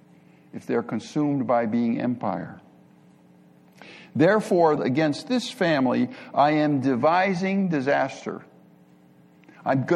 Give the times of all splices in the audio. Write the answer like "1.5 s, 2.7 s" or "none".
4.8 s